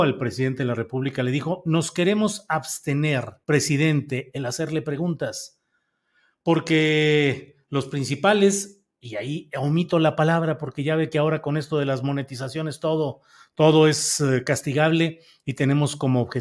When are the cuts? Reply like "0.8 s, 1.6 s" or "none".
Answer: 3.4 s